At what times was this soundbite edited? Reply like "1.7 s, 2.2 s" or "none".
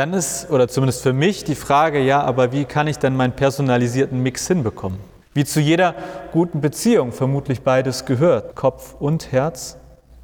5.2 s, 8.5 s